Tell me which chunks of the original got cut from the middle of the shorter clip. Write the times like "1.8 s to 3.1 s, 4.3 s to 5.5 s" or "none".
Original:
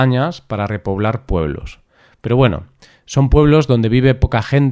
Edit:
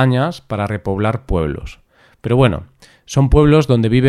none